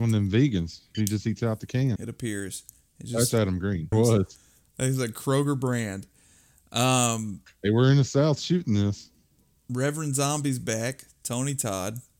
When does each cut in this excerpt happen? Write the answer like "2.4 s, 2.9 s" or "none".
0.9 s, 2.0 s, 3.9 s

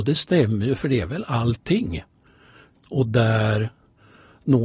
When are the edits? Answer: 2.8 s

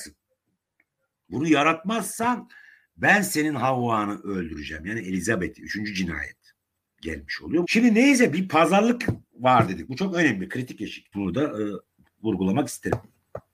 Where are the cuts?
7.6 s, 11.1 s

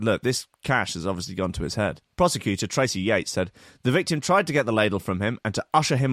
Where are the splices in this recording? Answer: 2.1 s

